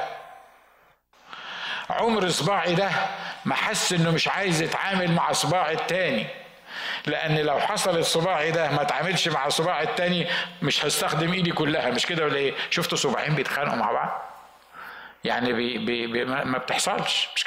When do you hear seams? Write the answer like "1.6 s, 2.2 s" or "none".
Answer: 16.5 s